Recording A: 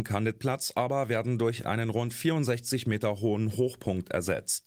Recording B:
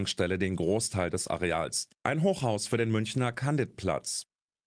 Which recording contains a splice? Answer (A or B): B